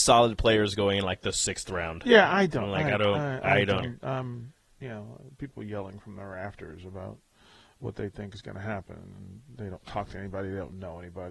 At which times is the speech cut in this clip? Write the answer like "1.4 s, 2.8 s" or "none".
3.8 s